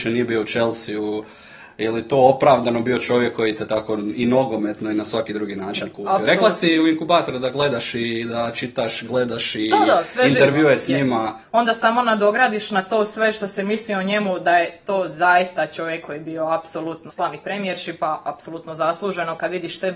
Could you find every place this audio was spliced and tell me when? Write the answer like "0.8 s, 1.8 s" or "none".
11.4 s, 17.1 s